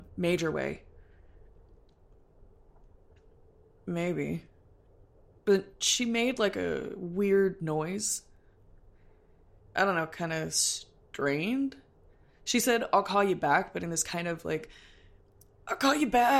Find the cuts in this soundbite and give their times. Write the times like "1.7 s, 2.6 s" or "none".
none